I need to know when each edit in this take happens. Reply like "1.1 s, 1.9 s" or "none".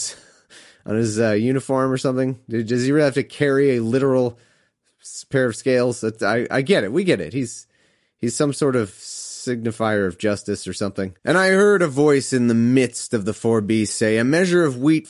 11.2 s